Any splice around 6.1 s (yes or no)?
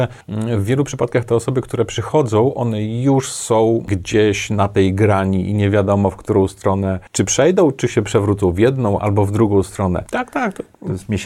no